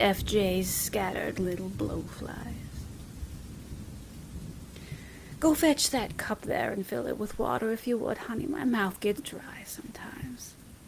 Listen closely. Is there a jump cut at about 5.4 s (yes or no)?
no